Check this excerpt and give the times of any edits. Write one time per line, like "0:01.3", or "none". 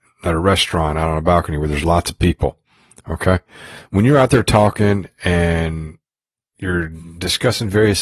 none